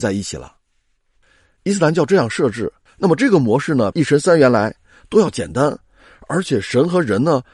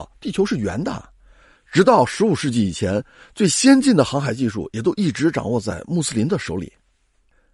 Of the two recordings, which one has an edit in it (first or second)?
first